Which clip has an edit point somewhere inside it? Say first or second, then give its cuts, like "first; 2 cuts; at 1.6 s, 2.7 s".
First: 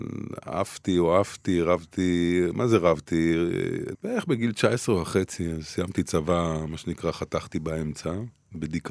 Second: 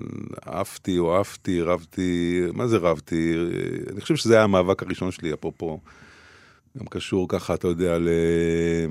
first; 1 cut; at 3.9 s